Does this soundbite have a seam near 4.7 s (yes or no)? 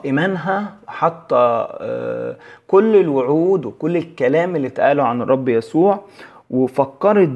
no